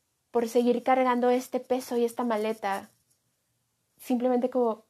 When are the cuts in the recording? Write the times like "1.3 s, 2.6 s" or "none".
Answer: 3.9 s